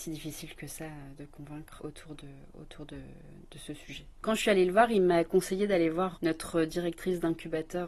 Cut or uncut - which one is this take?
cut